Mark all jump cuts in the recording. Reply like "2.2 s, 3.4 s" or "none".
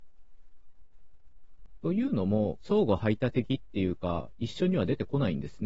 2.6 s